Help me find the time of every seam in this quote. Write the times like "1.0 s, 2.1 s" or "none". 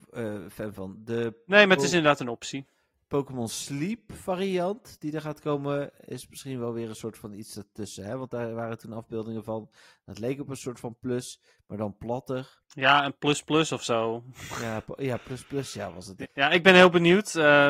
16.2 s